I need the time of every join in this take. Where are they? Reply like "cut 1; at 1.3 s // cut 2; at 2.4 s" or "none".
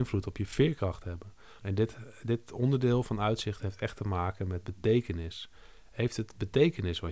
cut 1; at 1.6 s